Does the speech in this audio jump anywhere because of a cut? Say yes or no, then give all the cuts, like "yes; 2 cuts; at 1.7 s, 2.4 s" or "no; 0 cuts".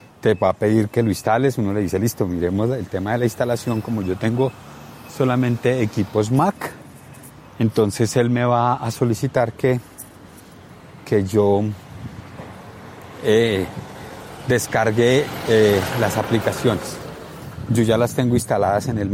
no; 0 cuts